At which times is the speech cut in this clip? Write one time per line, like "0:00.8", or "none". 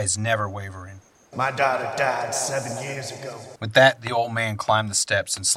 0:01.3
0:03.6